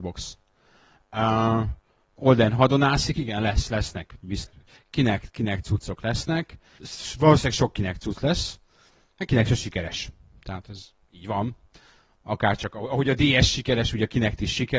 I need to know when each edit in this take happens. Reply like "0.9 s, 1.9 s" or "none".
none